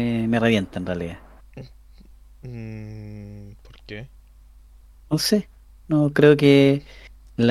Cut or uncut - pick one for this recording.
uncut